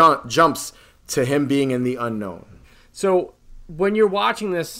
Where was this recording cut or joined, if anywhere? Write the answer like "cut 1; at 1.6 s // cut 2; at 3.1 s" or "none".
none

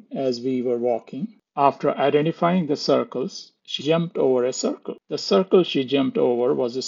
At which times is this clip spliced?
cut 1; at 3.8 s

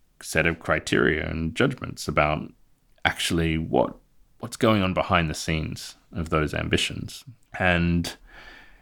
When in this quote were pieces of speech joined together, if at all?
cut 1; at 7.5 s

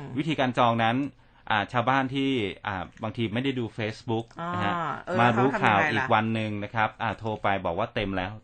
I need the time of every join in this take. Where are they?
cut 1; at 2.9 s

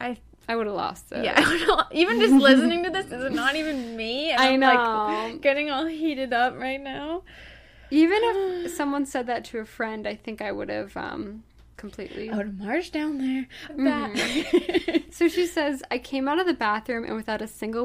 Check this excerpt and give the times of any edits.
cut 1; at 11.7 s // cut 2; at 13.7 s

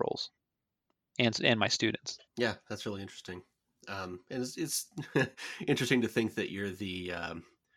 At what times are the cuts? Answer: cut 1; at 2.3 s

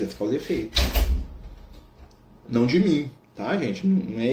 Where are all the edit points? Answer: cut 1; at 2.4 s

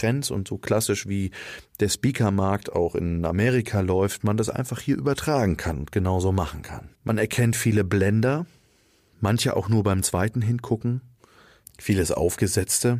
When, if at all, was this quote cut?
cut 1; at 6.9 s

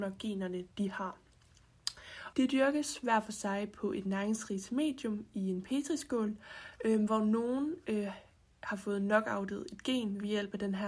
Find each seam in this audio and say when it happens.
cut 1; at 2.3 s

